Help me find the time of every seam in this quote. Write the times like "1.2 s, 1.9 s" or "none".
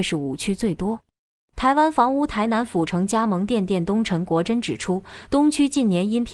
none